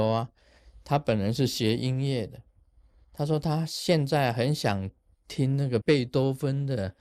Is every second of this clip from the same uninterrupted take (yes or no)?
no